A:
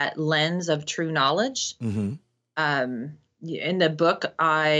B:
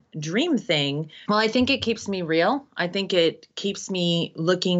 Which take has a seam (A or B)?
B